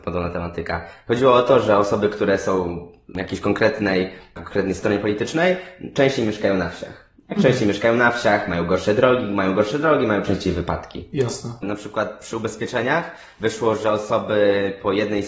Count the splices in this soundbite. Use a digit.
1